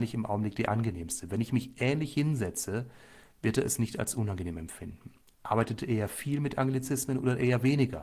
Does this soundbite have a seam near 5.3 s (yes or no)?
yes